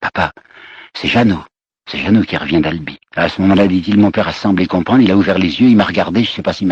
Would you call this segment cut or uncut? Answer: cut